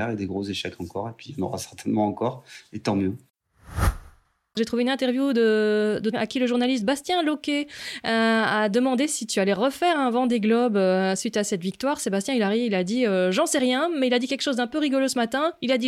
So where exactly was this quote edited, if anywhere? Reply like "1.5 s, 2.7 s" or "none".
6.1 s